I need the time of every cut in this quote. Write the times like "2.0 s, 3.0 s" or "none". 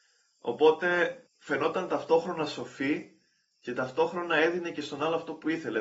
1.3 s

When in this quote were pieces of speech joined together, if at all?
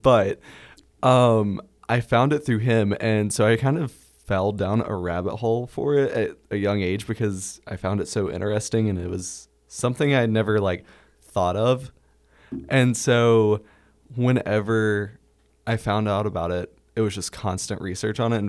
none

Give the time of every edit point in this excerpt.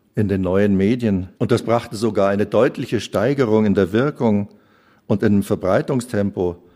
1.3 s

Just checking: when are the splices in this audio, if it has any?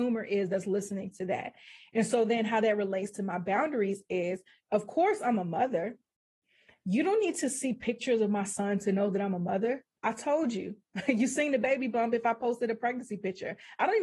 none

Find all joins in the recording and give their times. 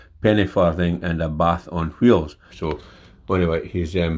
2.5 s

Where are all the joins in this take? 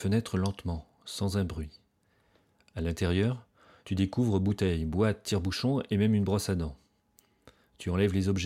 3.8 s

